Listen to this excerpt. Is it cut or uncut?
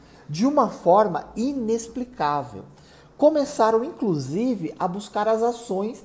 uncut